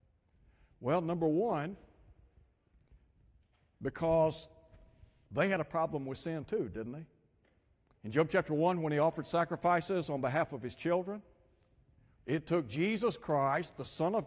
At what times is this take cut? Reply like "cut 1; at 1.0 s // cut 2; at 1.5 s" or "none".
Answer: cut 1; at 8.0 s // cut 2; at 12.2 s